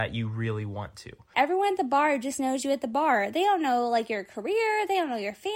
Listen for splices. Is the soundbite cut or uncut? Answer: cut